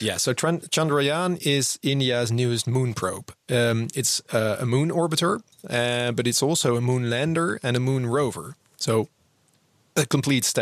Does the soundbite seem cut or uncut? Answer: uncut